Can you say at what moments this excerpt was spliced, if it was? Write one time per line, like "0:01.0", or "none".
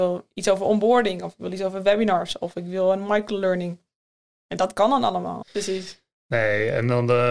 0:05.4

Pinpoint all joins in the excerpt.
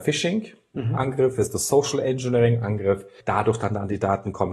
0:03.2

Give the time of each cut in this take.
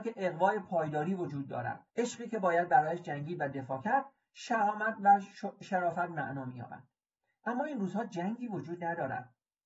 0:01.9

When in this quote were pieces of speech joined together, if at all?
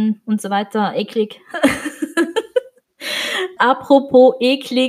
0:03.6

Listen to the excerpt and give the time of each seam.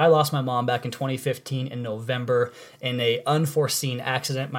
none

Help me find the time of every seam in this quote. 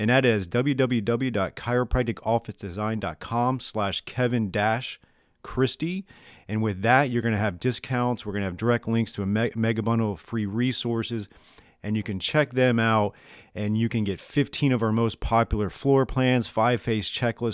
none

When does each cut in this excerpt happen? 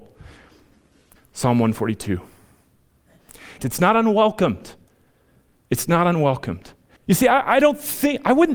0:01.2
0:03.6
0:07.0

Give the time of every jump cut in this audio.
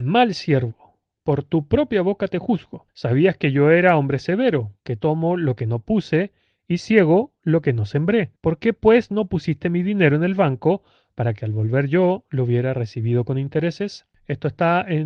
none

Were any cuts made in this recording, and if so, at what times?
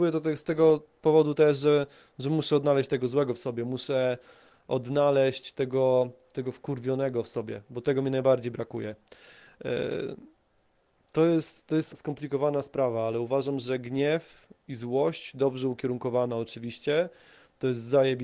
0:11.9

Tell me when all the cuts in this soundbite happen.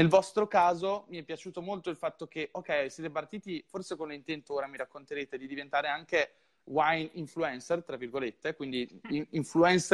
none

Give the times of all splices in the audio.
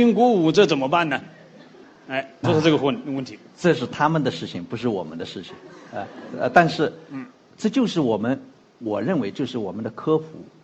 0:02.4

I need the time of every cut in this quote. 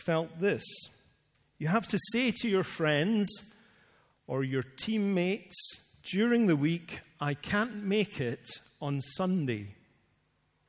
none

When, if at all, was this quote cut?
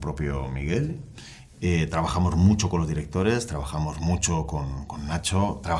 none

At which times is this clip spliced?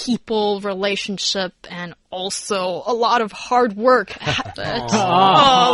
0:04.5

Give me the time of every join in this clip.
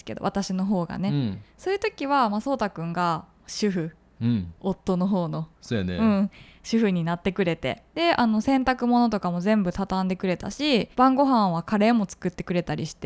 0:07.9
0:10.9

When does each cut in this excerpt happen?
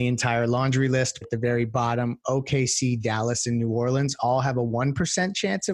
0:01.2

